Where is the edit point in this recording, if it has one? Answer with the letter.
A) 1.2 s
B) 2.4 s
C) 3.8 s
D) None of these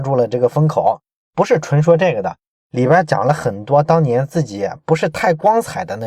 D